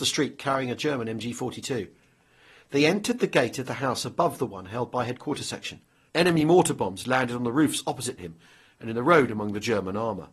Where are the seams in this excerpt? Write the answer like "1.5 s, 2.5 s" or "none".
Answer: 6.1 s

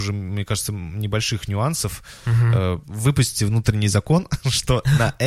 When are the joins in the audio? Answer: 2.8 s

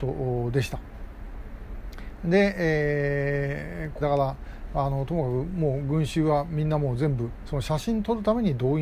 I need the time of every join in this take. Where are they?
4.0 s

